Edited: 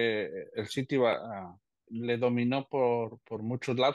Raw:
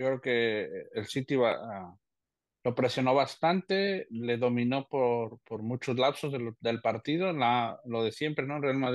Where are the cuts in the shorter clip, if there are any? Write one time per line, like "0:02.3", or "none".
0:01.9